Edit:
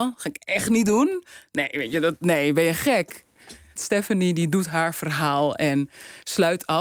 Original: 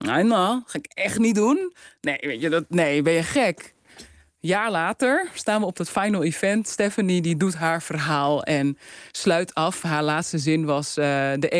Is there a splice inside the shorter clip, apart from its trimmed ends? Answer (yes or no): yes